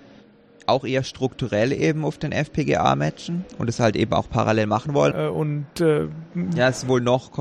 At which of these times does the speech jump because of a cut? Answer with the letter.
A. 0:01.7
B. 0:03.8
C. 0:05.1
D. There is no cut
C